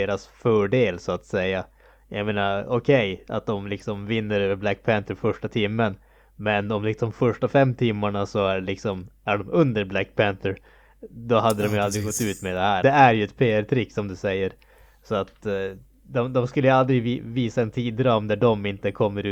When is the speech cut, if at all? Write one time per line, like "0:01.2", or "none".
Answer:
0:12.8